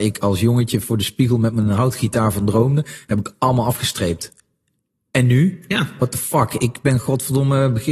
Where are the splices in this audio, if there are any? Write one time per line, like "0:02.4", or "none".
none